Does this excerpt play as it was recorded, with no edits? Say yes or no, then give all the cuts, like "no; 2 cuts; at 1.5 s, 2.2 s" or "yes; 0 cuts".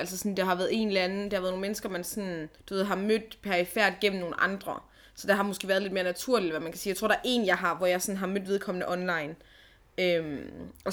no; 1 cut; at 2.6 s